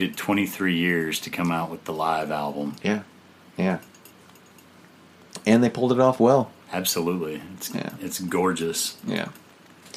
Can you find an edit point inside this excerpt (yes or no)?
no